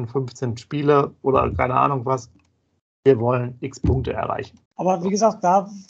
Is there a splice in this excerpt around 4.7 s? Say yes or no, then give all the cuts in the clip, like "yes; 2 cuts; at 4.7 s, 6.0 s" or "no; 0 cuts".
yes; 1 cut; at 4.7 s